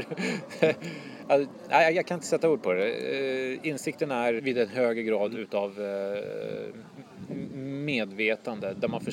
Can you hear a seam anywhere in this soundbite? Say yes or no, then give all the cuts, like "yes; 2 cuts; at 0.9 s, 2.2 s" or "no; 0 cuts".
yes; 1 cut; at 4.4 s